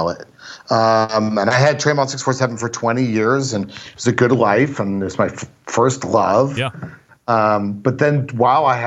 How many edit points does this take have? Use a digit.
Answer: 0